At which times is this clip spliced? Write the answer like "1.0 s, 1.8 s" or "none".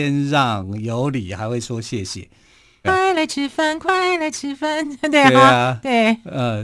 2.8 s